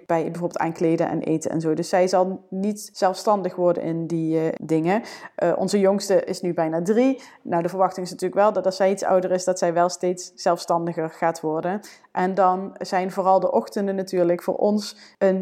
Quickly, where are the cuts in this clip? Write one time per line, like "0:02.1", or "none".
none